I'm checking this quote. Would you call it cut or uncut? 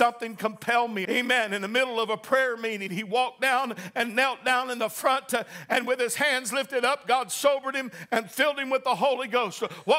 cut